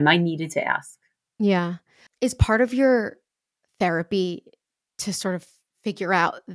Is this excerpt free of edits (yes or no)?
yes